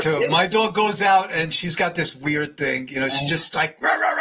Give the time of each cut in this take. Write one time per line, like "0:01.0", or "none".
none

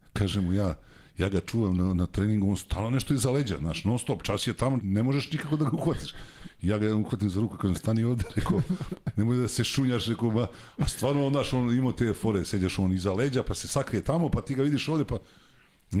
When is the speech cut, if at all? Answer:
0:04.8

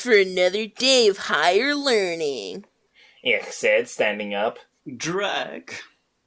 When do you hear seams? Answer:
none

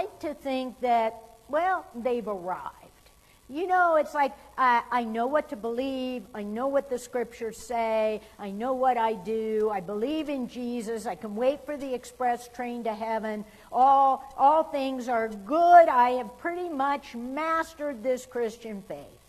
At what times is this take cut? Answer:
none

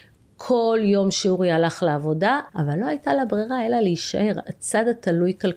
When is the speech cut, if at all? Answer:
0:02.5
0:04.4

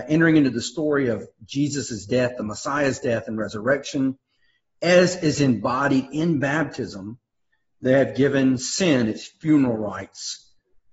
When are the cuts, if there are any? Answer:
none

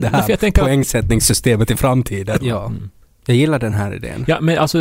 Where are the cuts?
0:02.4

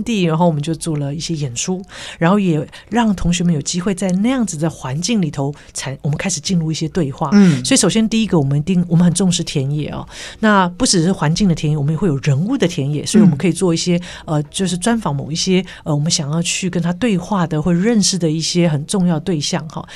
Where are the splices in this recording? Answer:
none

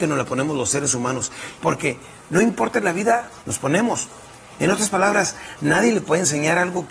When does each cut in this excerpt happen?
0:01.6
0:03.4

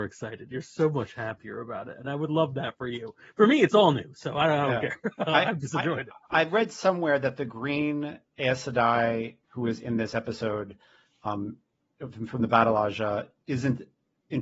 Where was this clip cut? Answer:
0:09.4

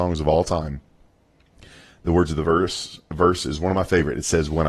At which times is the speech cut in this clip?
none

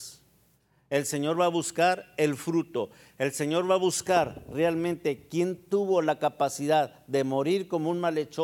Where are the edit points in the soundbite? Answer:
none

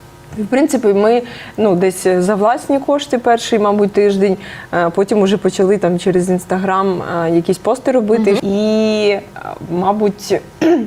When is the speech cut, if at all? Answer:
0:08.4

